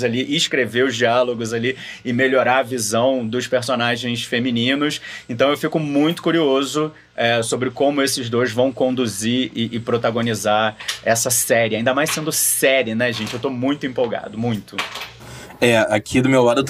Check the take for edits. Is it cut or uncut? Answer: uncut